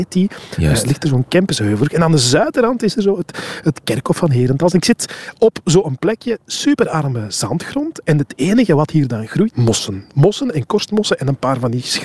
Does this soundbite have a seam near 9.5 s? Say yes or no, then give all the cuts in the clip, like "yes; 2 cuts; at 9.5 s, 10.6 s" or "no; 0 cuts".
yes; 1 cut; at 9.5 s